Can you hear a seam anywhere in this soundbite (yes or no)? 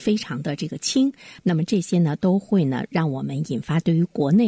yes